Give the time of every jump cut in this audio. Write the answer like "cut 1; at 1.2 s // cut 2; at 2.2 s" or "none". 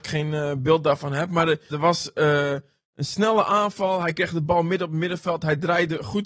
cut 1; at 1.7 s